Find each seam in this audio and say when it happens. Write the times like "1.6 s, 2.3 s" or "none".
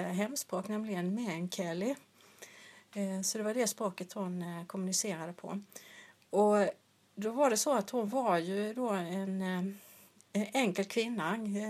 none